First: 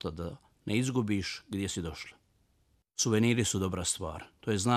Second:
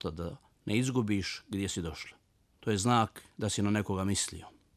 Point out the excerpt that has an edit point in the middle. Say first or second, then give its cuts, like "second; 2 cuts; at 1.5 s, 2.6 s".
second; 1 cut; at 2.5 s